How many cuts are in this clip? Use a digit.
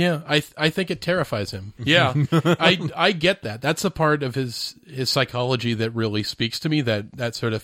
1